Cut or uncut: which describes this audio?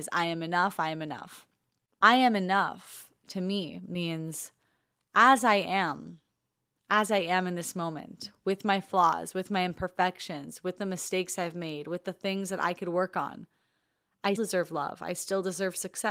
cut